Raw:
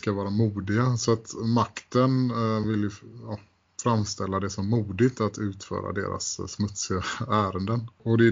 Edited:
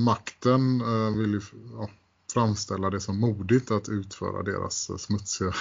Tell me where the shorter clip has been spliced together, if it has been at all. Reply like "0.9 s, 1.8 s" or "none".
none